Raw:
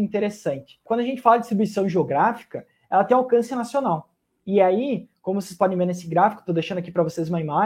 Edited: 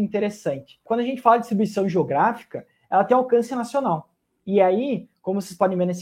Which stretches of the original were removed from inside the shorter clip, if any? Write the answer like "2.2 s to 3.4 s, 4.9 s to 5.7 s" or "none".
none